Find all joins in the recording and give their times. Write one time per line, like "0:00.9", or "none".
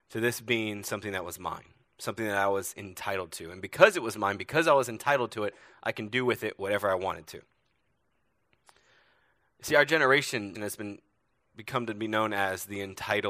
0:10.5